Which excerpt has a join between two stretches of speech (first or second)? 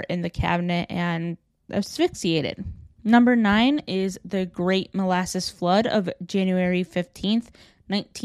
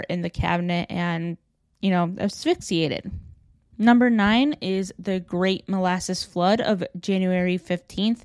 first